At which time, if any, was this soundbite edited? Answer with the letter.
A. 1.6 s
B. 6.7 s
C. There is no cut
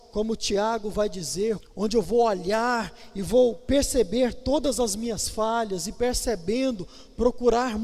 A